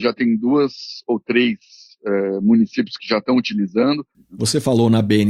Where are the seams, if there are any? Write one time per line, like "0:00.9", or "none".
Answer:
0:04.1